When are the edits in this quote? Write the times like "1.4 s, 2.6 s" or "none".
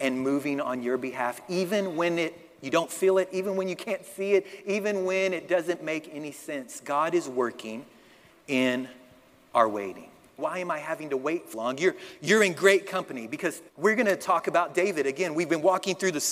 10.4 s, 11.5 s, 13.7 s